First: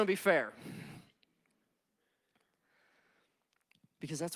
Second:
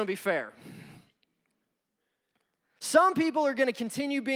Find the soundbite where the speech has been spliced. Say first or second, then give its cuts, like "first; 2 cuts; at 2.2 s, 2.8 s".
second; 1 cut; at 2.8 s